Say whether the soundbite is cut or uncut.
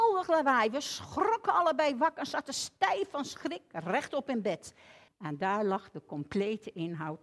cut